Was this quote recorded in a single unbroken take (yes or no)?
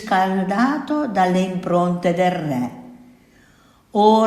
yes